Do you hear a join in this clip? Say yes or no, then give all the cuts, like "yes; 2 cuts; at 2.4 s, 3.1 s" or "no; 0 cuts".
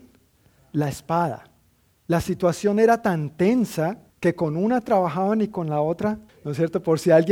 yes; 2 cuts; at 4.1 s, 6.3 s